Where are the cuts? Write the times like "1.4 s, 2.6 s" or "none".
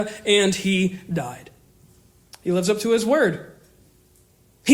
none